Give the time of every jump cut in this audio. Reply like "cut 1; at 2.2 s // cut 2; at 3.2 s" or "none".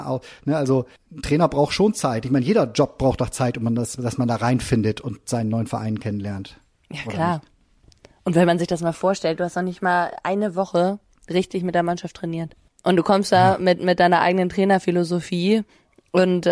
none